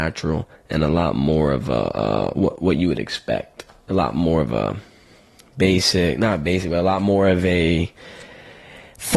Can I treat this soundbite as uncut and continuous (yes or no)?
yes